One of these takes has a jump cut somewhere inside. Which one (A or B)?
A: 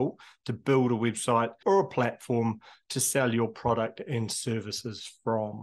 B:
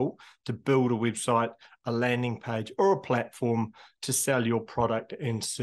A